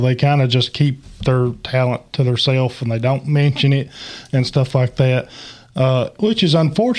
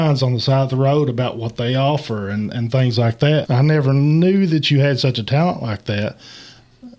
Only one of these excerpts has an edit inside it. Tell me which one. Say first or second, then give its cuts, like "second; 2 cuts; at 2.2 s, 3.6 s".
second; 1 cut; at 3.4 s